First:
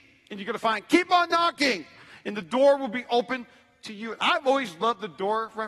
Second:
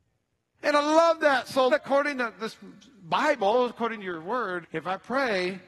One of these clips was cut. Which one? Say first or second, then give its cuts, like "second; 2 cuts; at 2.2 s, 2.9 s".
second; 2 cuts; at 1.7 s, 4.6 s